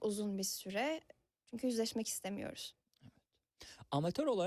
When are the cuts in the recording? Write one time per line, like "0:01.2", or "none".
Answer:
0:01.3